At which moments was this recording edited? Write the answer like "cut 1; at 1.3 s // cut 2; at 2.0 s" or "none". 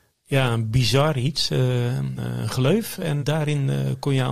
cut 1; at 2.2 s // cut 2; at 3.2 s